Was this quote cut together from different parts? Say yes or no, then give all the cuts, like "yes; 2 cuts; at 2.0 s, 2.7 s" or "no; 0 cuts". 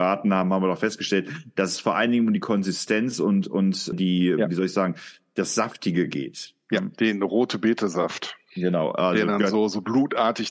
no; 0 cuts